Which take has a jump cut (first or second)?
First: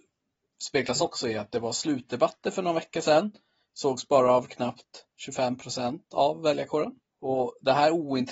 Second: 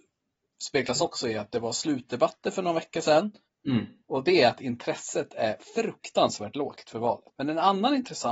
second